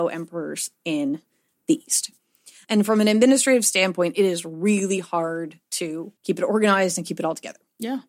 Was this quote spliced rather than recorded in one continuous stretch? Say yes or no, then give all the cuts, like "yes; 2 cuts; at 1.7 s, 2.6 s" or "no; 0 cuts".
yes; 2 cuts; at 2.6 s, 6.2 s